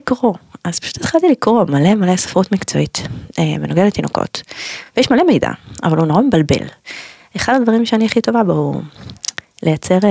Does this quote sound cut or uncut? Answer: uncut